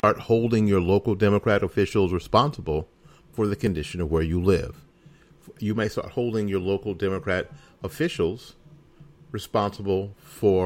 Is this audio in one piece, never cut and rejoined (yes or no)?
yes